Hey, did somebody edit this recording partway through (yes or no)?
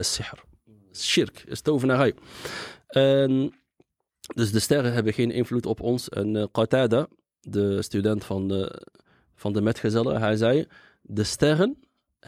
no